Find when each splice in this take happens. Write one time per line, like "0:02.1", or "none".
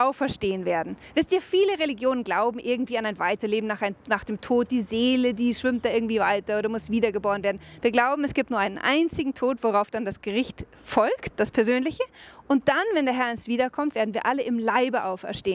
0:07.8